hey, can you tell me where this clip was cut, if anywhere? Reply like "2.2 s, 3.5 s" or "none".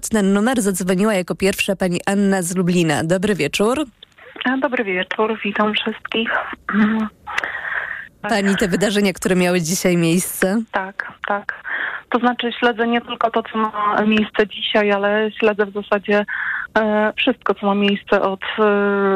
8.2 s